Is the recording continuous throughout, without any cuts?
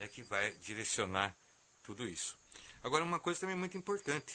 yes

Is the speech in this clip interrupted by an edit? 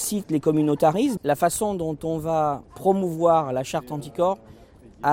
yes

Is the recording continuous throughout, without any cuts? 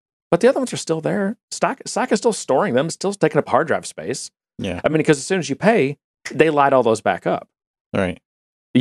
yes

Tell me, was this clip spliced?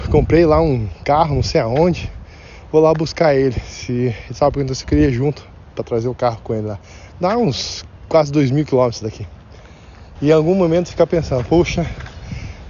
yes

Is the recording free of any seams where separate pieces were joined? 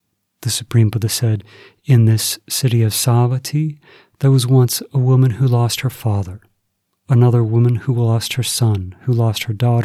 yes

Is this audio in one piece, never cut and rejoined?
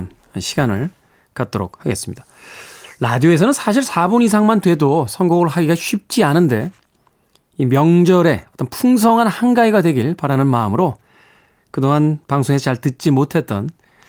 yes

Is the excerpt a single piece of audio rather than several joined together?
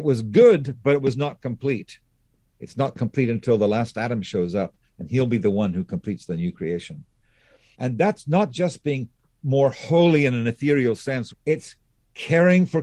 no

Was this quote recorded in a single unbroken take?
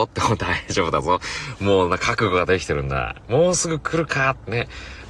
yes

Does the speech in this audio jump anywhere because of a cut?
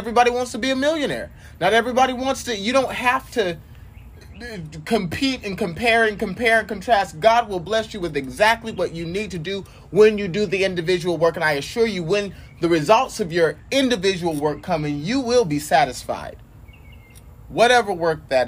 no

